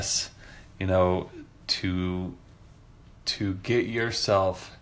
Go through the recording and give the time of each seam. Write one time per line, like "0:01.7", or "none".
none